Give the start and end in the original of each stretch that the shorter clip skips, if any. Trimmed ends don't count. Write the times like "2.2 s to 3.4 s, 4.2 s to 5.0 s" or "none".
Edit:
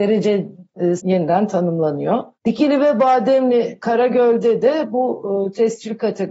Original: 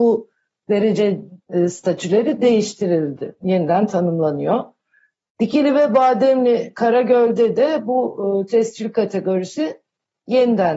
1.7 s to 3.4 s, 4.7 s to 5.3 s